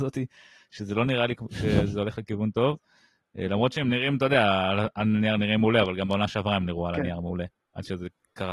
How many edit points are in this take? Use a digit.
0